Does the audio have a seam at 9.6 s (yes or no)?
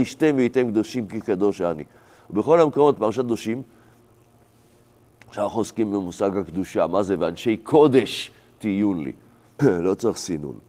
yes